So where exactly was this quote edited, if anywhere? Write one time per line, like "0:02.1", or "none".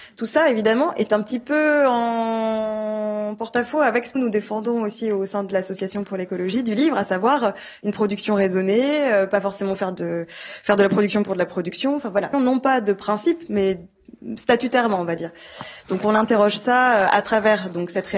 0:04.2
0:12.3